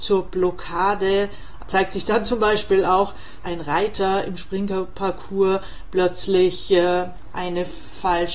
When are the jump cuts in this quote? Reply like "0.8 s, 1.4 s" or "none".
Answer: 1.6 s, 3.4 s